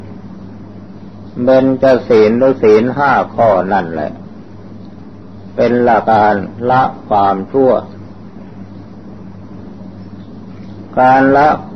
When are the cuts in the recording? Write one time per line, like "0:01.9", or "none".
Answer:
0:06.0